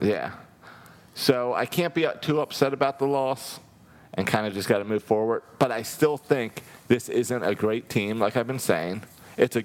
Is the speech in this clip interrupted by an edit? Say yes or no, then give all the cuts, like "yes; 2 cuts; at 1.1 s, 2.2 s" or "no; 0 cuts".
no; 0 cuts